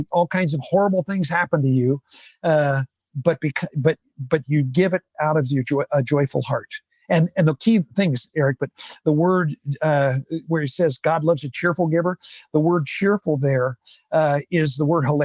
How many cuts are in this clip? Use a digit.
1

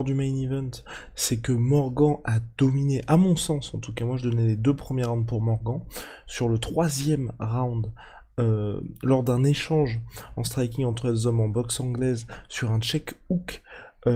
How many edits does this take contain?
0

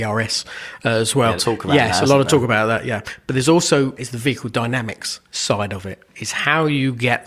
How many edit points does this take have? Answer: 2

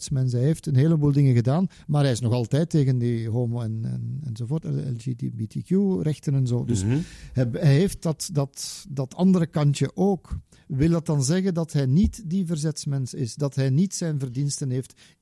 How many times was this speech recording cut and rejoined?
0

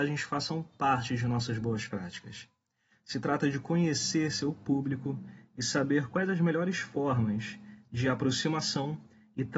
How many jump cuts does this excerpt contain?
1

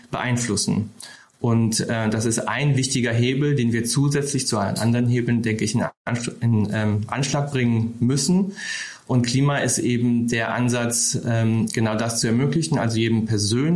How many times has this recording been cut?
0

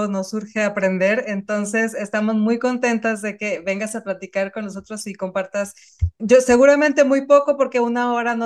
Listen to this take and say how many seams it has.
1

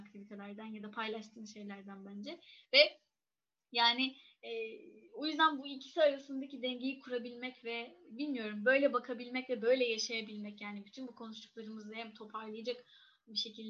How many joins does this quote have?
0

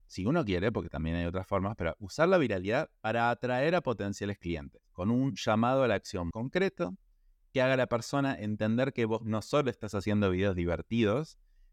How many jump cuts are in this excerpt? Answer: 1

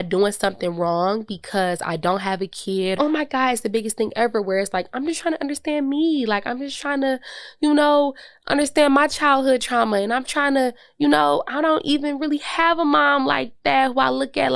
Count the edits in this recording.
1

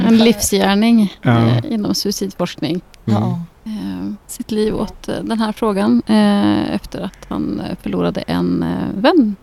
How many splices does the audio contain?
1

